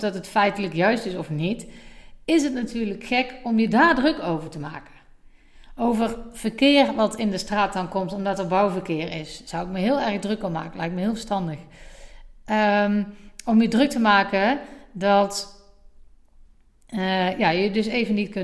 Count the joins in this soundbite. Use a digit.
0